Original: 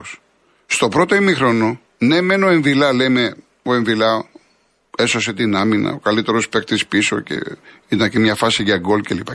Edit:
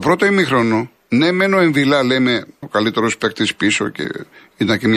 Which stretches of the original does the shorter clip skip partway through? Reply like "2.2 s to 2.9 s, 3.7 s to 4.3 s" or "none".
3.5 s to 5.9 s